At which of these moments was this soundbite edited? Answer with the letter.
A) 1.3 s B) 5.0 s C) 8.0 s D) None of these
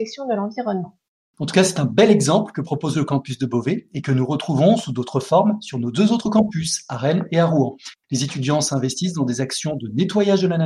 A